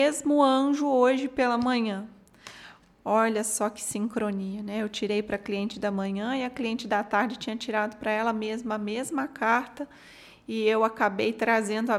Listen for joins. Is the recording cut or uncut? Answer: uncut